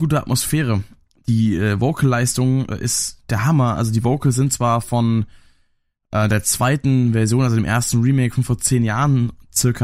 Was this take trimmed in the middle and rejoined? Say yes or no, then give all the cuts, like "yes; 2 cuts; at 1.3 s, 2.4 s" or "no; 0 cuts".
no; 0 cuts